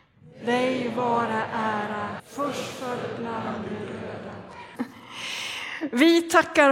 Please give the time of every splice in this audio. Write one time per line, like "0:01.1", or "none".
0:02.2
0:04.7

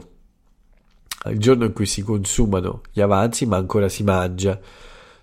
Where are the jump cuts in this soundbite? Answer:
0:01.2

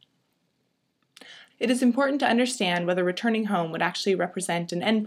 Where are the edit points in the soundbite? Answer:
0:01.5

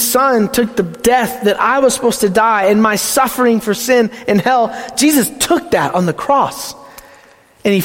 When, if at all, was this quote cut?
none

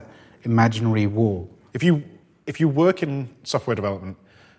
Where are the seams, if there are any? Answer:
0:01.7

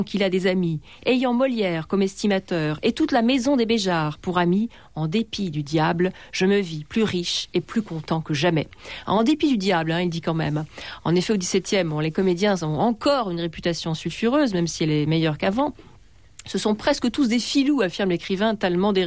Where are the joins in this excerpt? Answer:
none

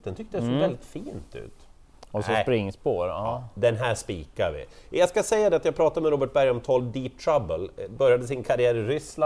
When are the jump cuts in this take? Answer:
none

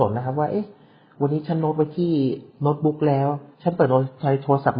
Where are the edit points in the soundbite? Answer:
0:03.5

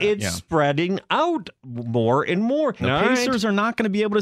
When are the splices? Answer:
0:02.8

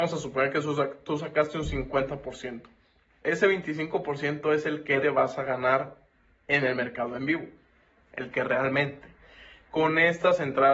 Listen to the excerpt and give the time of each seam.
0:03.2
0:05.0

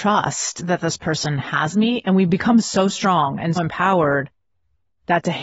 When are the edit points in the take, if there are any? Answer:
0:03.6

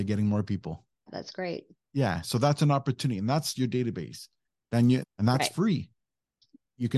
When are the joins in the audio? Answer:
0:01.1
0:05.0

